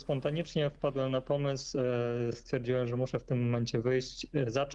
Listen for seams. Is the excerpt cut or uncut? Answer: uncut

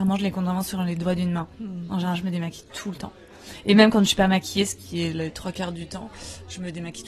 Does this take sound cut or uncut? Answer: uncut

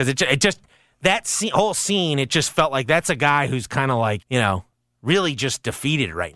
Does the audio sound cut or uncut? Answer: cut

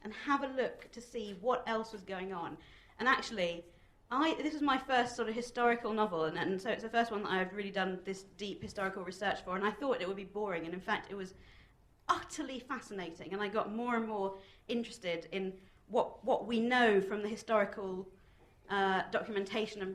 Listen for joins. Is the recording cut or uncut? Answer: uncut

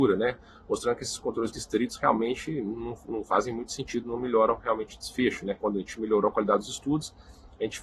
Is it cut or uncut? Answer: cut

